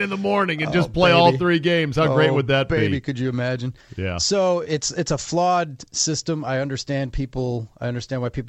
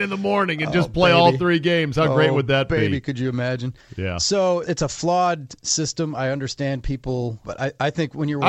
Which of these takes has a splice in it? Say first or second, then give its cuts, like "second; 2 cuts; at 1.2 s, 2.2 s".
second; 2 cuts; at 4.6 s, 7.4 s